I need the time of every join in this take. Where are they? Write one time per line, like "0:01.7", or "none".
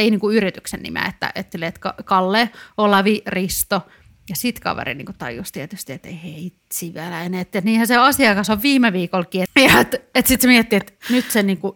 0:01.5
0:09.4